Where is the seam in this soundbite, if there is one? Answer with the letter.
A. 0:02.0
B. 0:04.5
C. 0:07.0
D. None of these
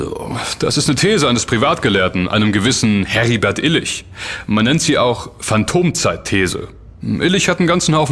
D